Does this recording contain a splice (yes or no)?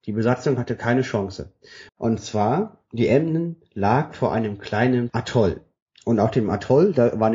yes